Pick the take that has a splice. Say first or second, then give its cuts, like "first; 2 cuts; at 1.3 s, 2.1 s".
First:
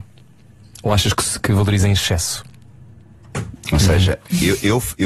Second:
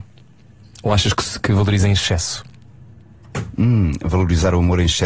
first; 1 cut; at 3.6 s